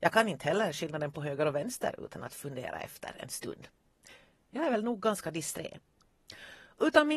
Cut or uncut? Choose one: uncut